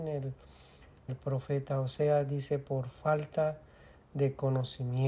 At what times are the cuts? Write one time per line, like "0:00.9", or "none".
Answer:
0:01.1